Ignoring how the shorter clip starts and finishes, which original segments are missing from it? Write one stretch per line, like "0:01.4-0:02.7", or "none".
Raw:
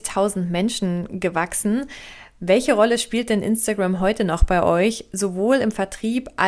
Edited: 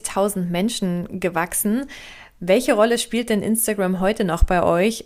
none